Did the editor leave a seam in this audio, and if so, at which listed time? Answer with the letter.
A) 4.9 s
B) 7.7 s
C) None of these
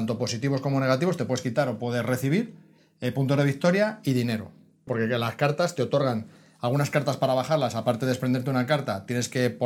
A